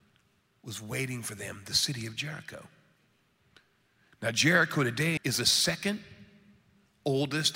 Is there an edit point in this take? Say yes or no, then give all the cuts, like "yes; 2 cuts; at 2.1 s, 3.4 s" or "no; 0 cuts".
yes; 1 cut; at 5.2 s